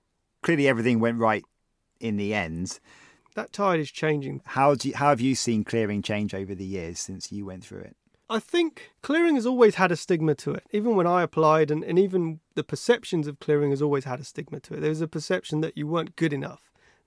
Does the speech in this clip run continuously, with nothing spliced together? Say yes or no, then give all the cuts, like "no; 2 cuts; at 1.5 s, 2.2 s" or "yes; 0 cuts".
no; 2 cuts; at 3.2 s, 4.4 s